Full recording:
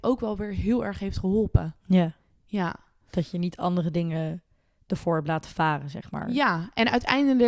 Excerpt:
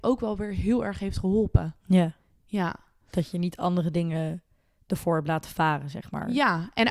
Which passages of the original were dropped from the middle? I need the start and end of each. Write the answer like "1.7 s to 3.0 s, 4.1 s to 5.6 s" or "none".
none